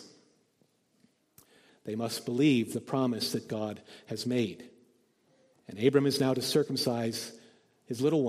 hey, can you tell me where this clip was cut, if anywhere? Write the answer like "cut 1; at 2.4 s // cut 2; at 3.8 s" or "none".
cut 1; at 1.7 s // cut 2; at 5.5 s